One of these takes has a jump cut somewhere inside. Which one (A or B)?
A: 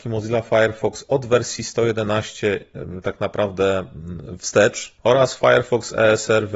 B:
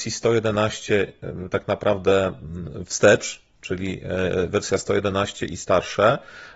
A